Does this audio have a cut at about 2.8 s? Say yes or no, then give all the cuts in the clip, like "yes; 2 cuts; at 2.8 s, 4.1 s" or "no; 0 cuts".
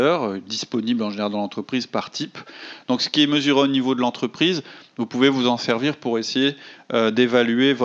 yes; 1 cut; at 2.8 s